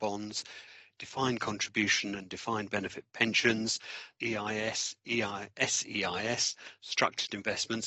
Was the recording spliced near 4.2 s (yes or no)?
yes